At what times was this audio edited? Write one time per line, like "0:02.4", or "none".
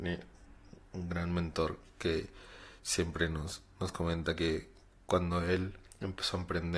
none